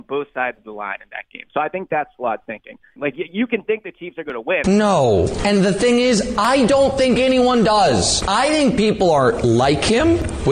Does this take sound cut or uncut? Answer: cut